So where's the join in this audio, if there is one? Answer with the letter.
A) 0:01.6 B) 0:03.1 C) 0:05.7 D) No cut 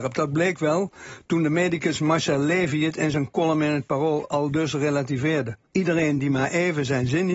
C